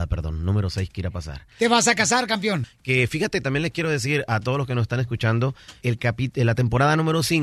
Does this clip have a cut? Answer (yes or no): yes